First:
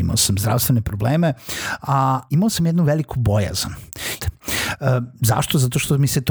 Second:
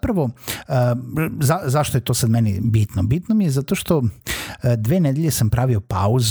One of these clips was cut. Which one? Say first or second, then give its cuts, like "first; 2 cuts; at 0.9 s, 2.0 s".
first; 2 cuts; at 2.3 s, 4.2 s